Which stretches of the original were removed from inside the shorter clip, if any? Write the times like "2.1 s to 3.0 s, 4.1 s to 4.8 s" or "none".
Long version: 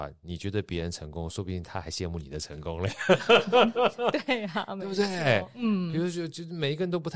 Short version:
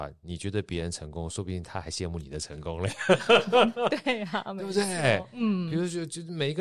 3.7 s to 4.0 s